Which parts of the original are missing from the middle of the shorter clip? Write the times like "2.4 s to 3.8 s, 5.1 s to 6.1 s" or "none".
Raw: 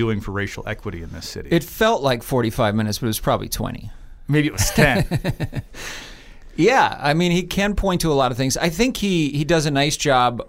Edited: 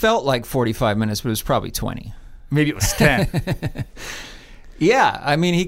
none